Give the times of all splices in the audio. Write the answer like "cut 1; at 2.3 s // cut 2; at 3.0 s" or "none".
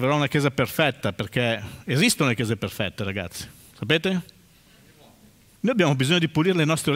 cut 1; at 5.6 s